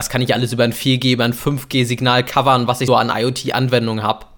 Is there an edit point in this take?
yes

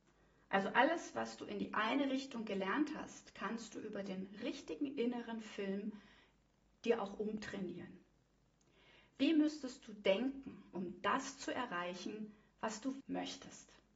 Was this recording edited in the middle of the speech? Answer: yes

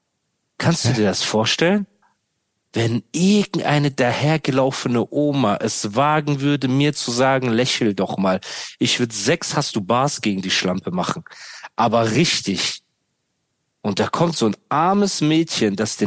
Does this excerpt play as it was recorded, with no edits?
yes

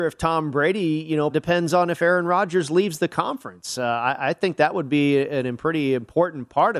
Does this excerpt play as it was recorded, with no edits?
no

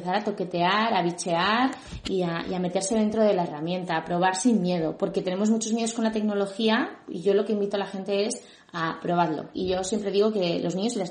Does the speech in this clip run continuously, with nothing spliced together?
no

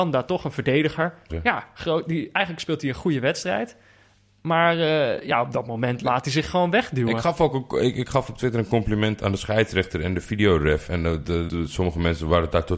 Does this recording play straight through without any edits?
no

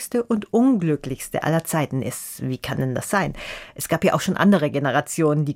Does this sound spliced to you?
no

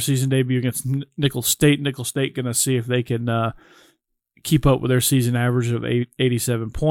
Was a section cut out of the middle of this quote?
no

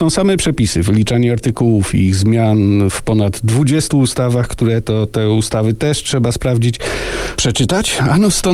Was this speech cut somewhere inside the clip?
yes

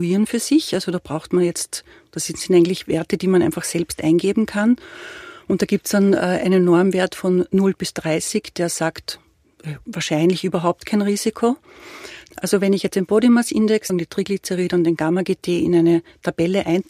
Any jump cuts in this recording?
yes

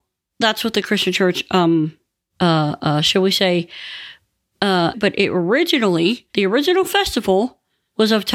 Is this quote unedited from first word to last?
no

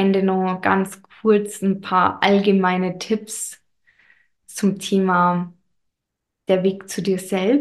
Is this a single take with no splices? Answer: no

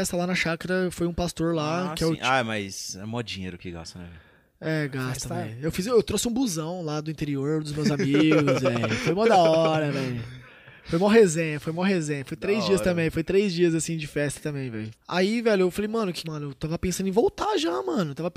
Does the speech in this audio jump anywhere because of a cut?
yes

